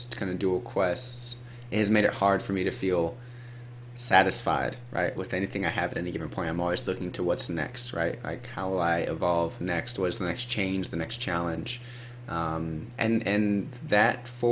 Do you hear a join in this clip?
no; 0 cuts

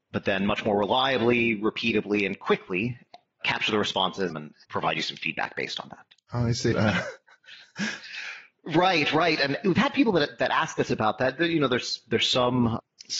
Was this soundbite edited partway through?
yes; 2 cuts; at 4.3 s, 6.7 s

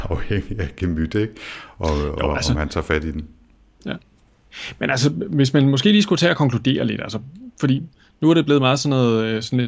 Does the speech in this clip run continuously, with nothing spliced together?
yes; 0 cuts

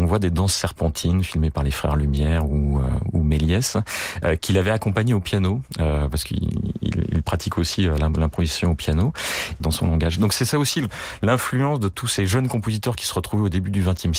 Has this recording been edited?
yes; 1 cut; at 9.6 s

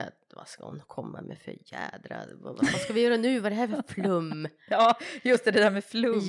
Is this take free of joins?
yes; 0 cuts

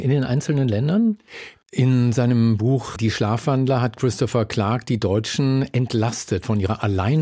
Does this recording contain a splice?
yes; 2 cuts; at 1.6 s, 3.0 s

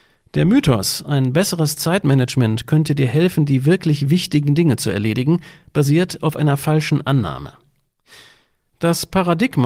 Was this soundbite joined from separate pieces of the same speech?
no; 0 cuts

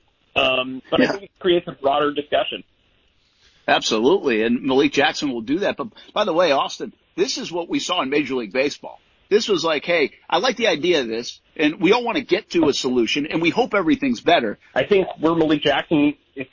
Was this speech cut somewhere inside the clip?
yes; 2 cuts; at 9.3 s, 14.7 s

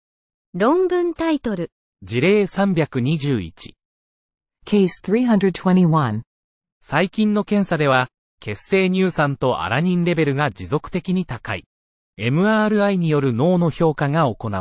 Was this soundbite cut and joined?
yes; 2 cuts; at 6.7 s, 12.1 s

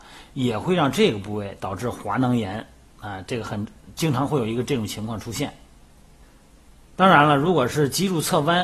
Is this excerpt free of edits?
yes; 0 cuts

